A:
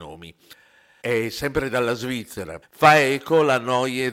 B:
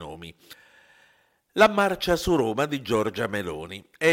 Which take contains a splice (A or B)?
A